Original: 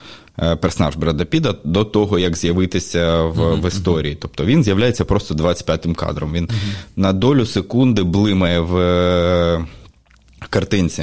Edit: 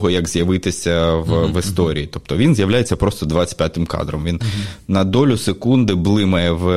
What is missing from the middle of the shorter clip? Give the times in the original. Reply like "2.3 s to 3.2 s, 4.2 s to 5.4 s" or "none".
none